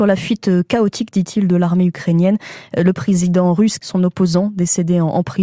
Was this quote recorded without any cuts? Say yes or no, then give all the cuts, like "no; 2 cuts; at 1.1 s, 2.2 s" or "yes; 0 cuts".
no; 1 cut; at 3.8 s